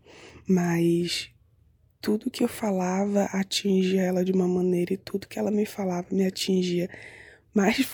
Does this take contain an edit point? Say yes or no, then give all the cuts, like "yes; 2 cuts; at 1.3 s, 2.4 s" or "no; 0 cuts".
no; 0 cuts